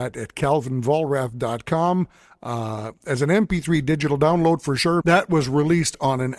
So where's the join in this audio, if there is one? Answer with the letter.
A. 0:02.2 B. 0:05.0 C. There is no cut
B